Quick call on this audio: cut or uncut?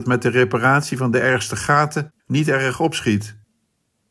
cut